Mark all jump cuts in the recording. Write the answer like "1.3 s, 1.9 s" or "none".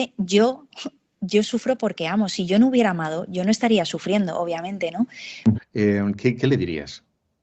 5.5 s